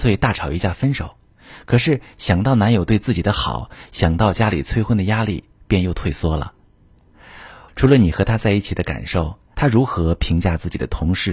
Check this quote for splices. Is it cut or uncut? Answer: cut